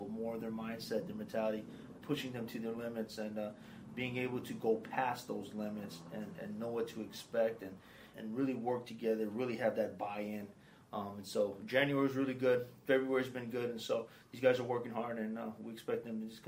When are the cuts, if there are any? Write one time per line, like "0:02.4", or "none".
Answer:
0:02.0
0:08.1